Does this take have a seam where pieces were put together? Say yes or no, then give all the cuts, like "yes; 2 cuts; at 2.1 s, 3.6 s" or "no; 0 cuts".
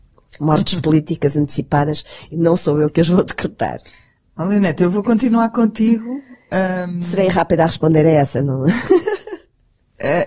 no; 0 cuts